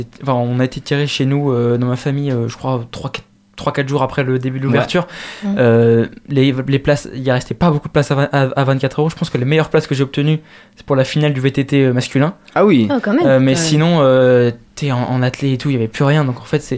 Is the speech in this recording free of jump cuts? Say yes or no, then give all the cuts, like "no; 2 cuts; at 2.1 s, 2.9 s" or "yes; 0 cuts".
yes; 0 cuts